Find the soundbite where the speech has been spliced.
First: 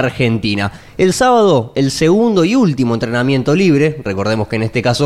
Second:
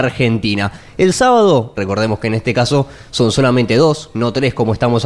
second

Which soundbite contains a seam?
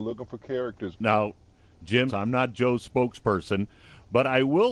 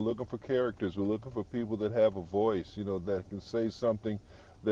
first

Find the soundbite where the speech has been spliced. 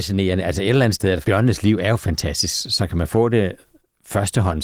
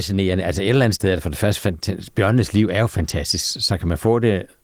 first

